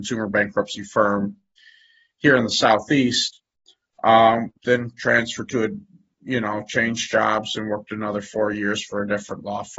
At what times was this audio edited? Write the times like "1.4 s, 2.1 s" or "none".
4.6 s